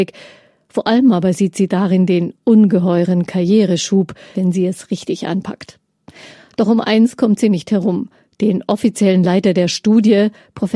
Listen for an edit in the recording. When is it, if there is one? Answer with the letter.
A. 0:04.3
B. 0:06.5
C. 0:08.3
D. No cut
A